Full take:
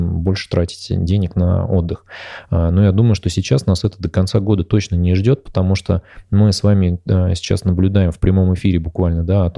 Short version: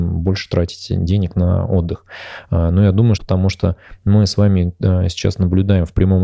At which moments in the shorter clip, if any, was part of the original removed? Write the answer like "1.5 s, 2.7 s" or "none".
3.2 s